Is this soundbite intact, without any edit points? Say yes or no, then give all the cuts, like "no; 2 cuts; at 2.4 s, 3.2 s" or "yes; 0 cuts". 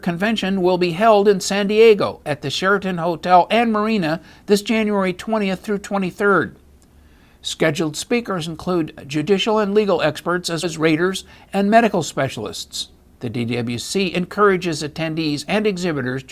no; 2 cuts; at 10.6 s, 13.1 s